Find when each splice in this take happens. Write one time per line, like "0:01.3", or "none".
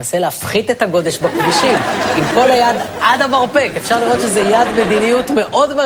none